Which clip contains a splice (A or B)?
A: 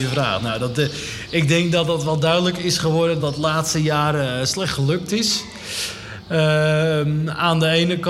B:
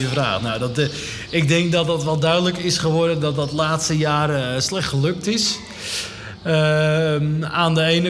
A